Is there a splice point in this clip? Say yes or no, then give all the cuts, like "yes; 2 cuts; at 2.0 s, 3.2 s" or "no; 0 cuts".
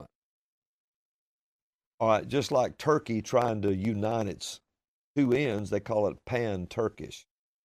no; 0 cuts